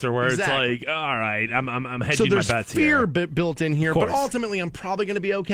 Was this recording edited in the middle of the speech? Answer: no; 0 cuts

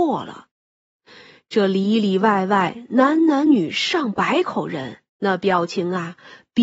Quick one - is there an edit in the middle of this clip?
yes; 2 cuts; at 3.5 s, 5.1 s

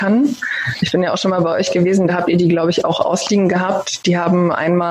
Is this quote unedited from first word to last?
yes; 0 cuts

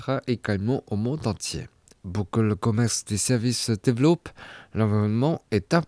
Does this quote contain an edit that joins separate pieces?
no; 0 cuts

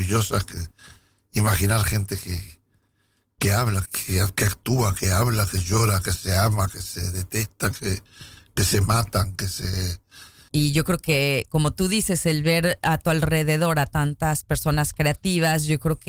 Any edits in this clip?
yes; 2 cuts; at 3.9 s, 10.5 s

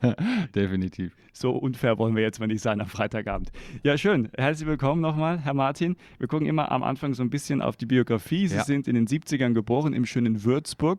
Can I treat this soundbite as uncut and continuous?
yes; 0 cuts

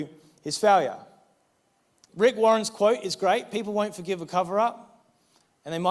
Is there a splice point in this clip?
yes; 1 cut; at 2.1 s

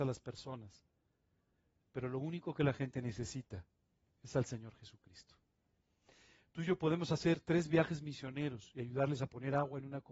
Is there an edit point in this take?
no; 0 cuts

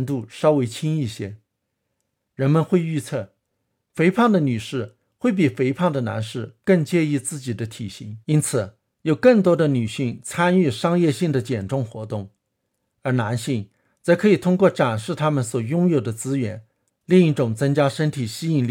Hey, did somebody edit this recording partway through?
yes; 2 cuts; at 8.2 s, 16.9 s

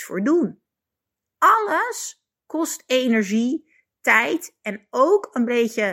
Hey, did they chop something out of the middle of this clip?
no; 0 cuts

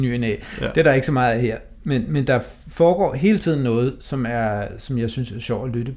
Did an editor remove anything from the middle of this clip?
no; 0 cuts

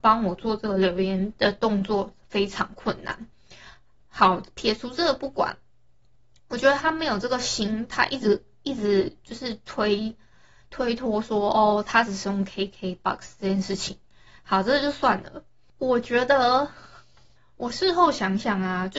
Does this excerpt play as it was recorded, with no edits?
yes; 0 cuts

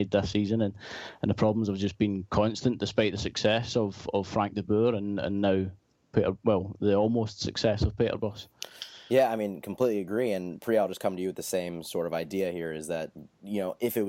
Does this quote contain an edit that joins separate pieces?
no; 0 cuts

